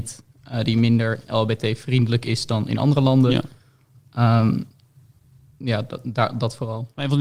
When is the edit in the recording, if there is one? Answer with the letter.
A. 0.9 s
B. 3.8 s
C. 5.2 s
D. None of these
D